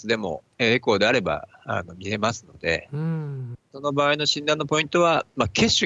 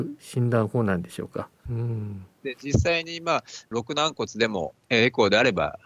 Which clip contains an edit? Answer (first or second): second